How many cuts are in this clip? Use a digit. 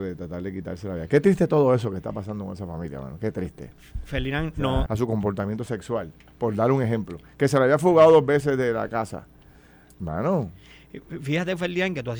1